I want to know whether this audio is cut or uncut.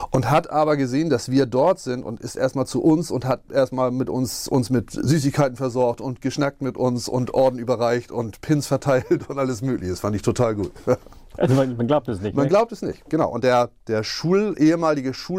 uncut